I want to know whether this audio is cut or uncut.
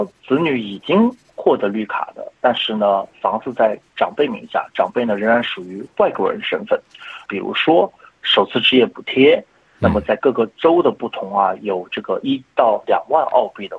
cut